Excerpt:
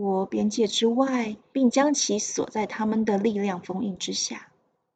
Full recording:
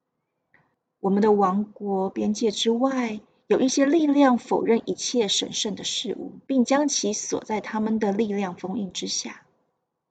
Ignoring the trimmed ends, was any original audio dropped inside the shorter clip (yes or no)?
yes